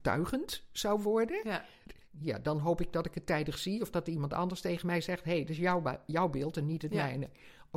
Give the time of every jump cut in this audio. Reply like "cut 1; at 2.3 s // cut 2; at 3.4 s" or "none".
none

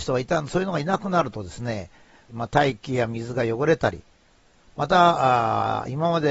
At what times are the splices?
cut 1; at 2.3 s

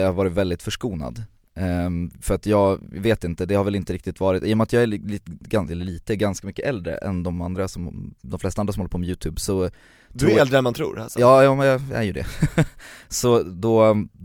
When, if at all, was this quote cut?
none

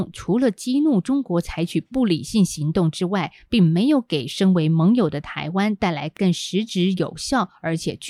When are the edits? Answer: none

